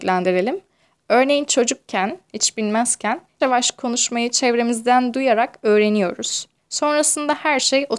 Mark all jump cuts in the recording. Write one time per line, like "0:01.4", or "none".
0:03.4
0:06.6